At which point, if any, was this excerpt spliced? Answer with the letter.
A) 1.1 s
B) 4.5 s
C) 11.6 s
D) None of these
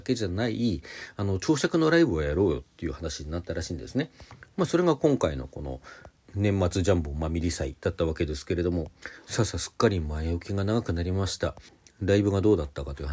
D